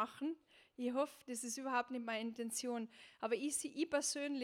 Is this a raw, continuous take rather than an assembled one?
yes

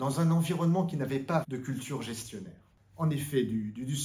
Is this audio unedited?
no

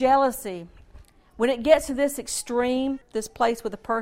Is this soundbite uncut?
no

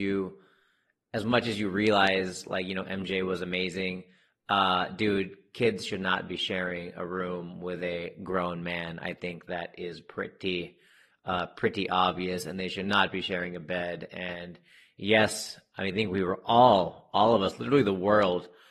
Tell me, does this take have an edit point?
no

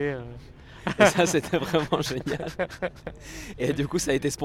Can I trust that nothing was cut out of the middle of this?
yes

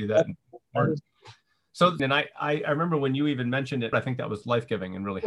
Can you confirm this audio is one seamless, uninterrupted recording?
no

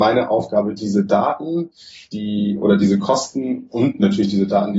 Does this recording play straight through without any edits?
yes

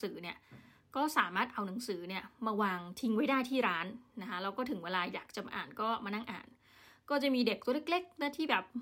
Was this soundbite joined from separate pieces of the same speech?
no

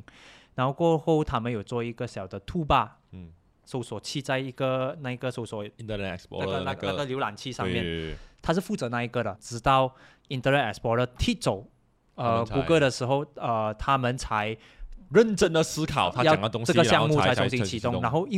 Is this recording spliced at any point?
yes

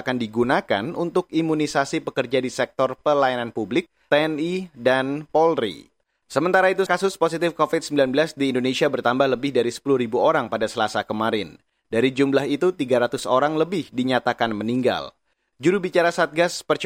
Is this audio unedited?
no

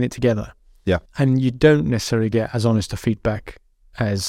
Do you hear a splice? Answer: yes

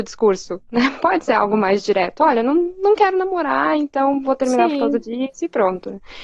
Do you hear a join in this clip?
no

